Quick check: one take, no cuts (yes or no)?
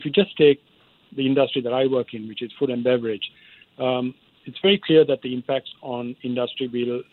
yes